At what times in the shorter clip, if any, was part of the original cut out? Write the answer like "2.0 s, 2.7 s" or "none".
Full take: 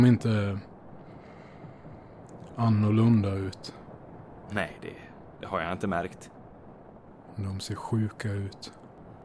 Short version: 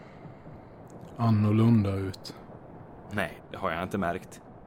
3.4 s